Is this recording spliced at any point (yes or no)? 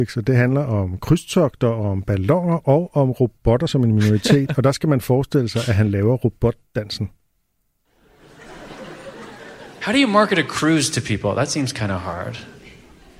no